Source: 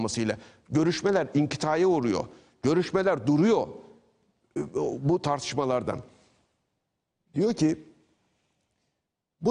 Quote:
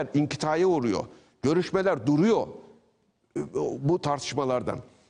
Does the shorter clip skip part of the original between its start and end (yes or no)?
no